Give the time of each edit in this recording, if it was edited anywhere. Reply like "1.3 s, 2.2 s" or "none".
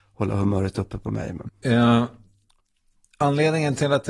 1.5 s